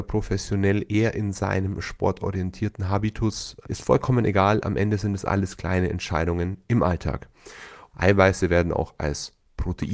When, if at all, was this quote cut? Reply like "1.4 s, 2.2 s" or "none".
3.6 s, 7.9 s